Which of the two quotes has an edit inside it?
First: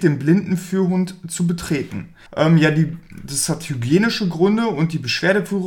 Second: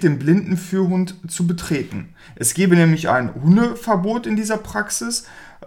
first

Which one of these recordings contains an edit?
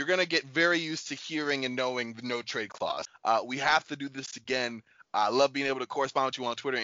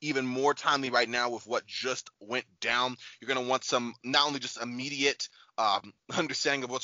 first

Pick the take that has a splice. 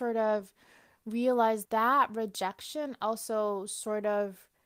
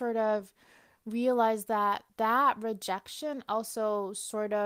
first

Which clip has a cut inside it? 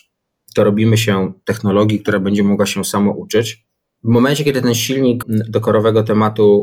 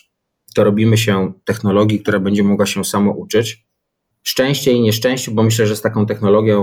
first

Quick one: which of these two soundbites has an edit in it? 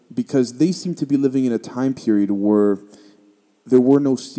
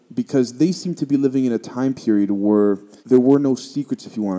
second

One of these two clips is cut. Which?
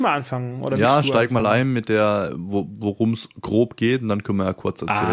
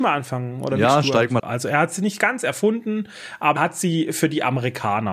second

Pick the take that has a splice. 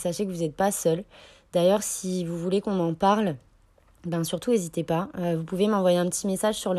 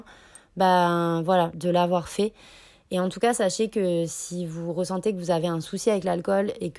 second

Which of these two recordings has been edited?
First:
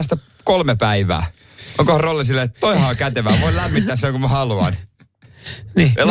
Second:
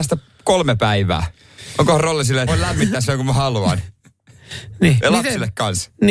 second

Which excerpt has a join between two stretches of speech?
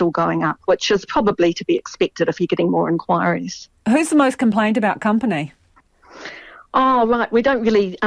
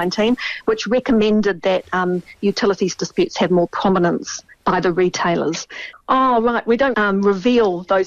second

